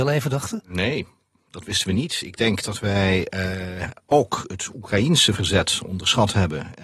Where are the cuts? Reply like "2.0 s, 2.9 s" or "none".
none